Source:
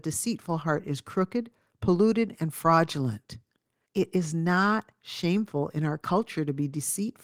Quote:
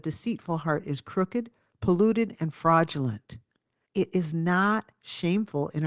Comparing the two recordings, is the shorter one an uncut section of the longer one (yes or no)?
yes